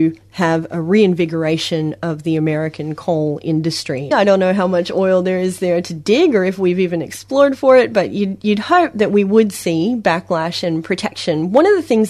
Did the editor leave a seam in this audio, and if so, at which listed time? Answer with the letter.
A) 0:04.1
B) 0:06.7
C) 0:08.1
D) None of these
A